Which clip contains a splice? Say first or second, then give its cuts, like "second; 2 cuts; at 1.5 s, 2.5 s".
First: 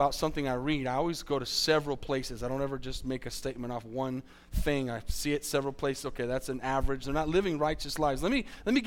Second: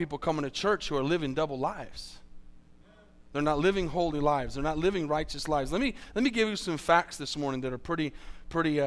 first; 1 cut; at 7.0 s